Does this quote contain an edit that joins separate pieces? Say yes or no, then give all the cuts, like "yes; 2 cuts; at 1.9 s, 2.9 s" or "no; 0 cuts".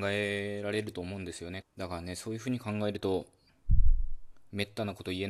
yes; 1 cut; at 1.6 s